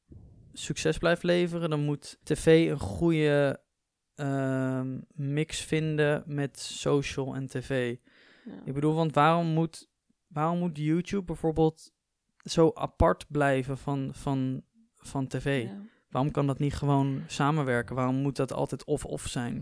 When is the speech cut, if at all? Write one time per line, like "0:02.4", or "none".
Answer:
0:02.2